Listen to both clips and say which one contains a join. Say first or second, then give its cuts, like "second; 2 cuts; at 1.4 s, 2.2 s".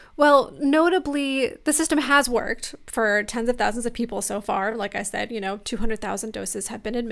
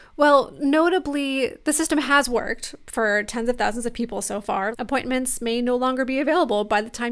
second; 1 cut; at 4.7 s